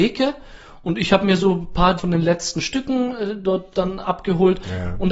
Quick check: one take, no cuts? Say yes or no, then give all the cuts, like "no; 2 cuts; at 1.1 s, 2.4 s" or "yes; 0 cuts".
no; 2 cuts; at 2.0 s, 3.4 s